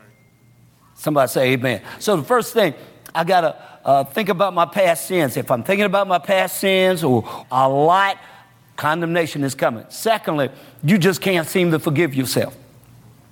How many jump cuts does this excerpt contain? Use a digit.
1